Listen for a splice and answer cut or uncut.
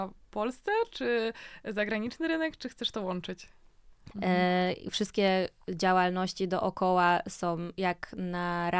cut